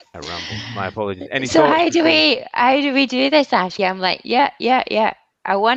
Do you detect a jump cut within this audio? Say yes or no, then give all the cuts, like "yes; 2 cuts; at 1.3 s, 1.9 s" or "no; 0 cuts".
yes; 1 cut; at 3.8 s